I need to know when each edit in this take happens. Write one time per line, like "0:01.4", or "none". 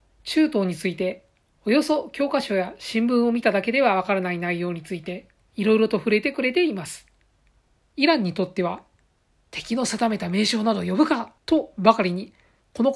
0:07.8
0:11.4